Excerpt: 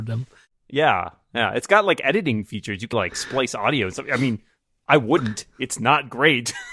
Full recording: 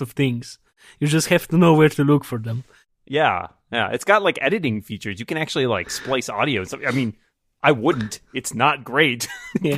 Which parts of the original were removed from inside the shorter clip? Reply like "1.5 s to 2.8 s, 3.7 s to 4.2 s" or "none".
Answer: 5.3 s to 5.7 s